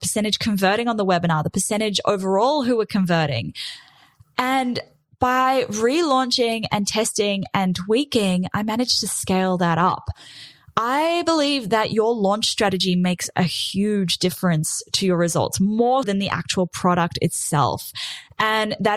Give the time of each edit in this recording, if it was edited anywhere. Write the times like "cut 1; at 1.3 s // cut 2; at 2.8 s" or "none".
cut 1; at 16.0 s